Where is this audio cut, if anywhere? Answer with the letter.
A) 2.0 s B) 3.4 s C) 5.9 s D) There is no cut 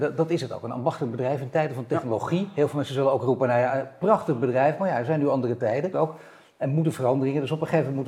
C